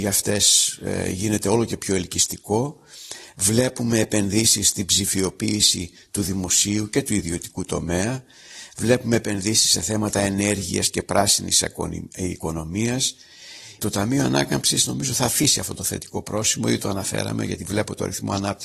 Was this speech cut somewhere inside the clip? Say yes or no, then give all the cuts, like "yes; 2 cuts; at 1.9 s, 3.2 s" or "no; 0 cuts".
yes; 1 cut; at 13.8 s